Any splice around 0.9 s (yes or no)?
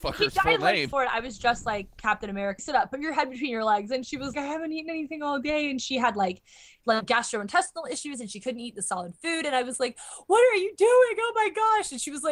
yes